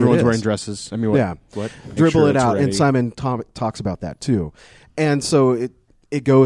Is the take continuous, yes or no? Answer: no